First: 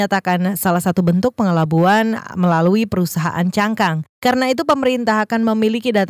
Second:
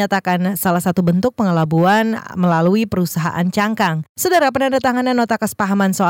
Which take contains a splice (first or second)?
second